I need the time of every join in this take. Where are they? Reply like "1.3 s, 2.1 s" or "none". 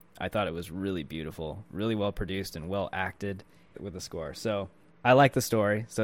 3.7 s